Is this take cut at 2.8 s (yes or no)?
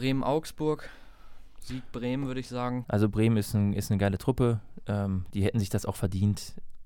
yes